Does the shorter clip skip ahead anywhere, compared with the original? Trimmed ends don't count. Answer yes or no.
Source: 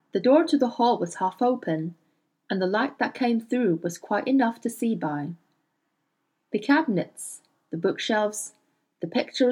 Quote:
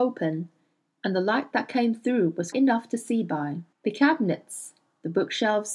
yes